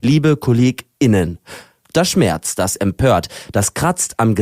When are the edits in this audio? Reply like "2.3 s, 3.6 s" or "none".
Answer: 1.8 s